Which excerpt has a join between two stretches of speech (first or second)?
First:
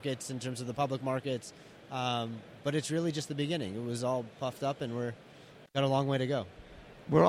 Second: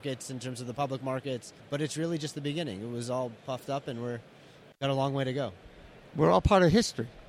second